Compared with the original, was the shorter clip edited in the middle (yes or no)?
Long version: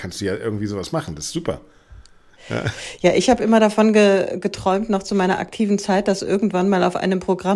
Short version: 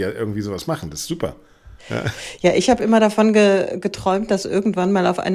yes